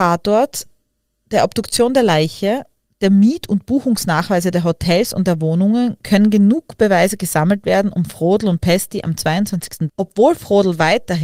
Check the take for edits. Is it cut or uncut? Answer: cut